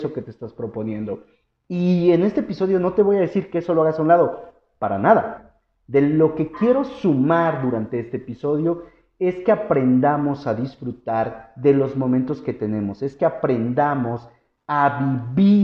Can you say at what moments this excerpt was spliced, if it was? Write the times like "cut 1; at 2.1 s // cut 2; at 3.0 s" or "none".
none